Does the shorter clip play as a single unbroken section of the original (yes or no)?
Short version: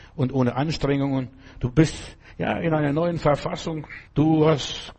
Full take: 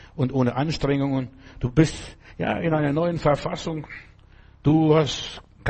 no